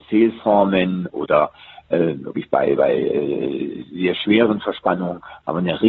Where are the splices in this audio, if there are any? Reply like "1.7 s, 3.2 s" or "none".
none